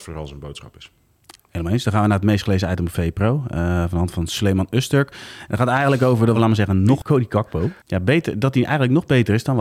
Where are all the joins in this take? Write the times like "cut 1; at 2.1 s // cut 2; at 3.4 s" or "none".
cut 1; at 6.3 s

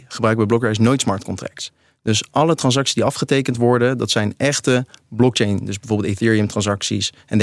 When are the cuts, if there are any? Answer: none

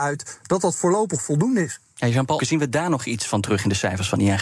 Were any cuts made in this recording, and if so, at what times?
cut 1; at 2.4 s

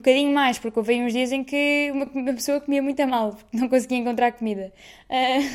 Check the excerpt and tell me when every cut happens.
none

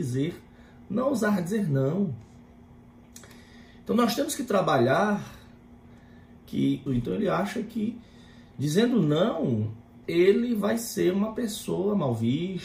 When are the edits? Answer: cut 1; at 6.9 s // cut 2; at 10.0 s

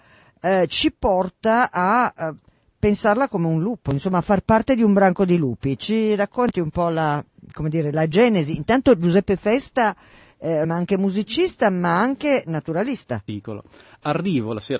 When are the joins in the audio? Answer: cut 1; at 10.6 s // cut 2; at 13.3 s

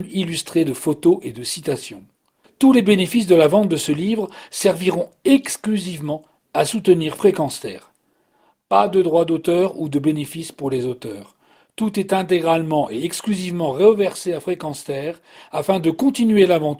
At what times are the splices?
none

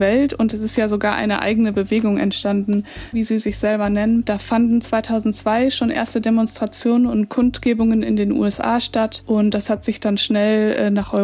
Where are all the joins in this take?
cut 1; at 3.1 s

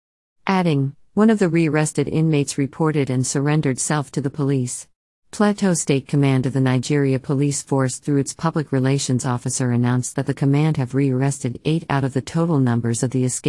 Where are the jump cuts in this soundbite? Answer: cut 1; at 5.1 s

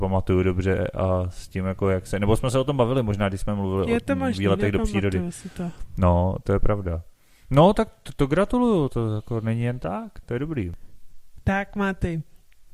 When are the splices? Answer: none

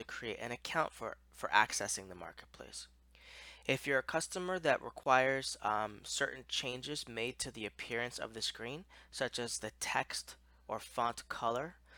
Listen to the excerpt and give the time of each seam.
none

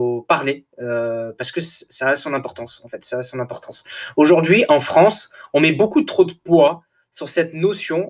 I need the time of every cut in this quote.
none

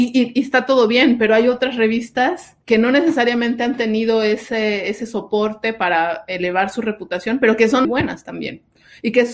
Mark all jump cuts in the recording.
cut 1; at 2.6 s // cut 2; at 7.8 s

